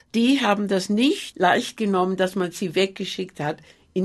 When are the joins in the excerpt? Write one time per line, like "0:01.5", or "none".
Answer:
0:01.3